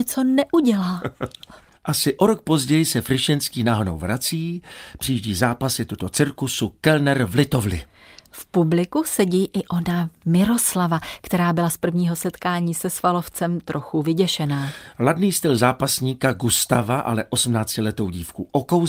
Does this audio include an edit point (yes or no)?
no